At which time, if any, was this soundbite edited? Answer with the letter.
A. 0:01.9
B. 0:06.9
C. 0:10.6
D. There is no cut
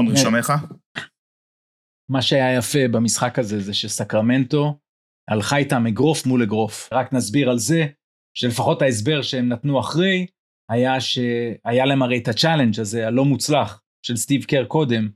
B